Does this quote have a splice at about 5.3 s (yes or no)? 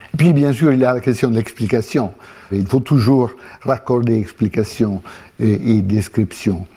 no